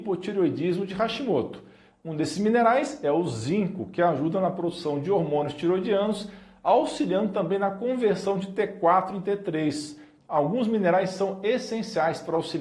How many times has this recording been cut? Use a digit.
2